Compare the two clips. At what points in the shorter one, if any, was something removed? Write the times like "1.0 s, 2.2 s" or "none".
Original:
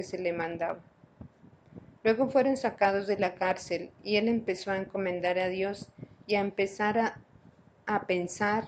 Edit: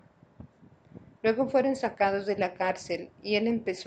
none